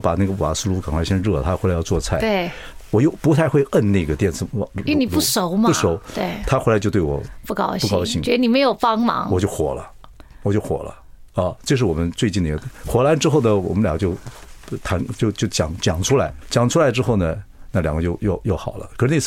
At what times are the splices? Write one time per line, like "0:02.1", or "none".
0:16.4